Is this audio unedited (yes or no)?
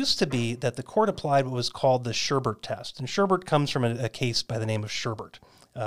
yes